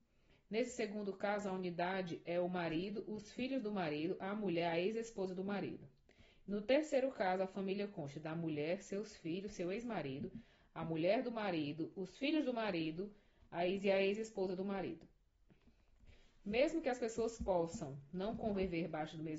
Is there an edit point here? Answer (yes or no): no